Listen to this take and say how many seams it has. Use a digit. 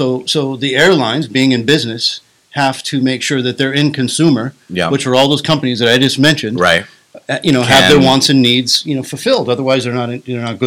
0